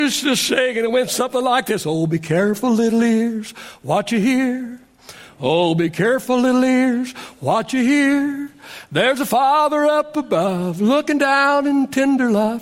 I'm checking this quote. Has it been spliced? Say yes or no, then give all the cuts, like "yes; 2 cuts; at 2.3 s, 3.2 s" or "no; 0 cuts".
no; 0 cuts